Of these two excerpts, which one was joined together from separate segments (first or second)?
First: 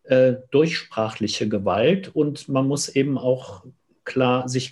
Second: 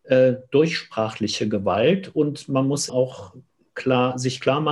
second